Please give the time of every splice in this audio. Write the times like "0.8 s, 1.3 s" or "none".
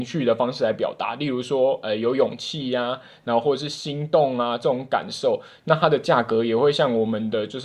none